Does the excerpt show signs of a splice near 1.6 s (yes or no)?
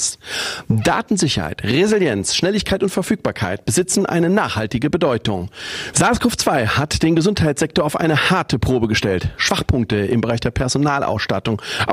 no